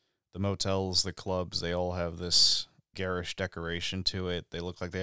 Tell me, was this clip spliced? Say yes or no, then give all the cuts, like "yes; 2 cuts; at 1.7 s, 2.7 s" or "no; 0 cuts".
yes; 1 cut; at 2.9 s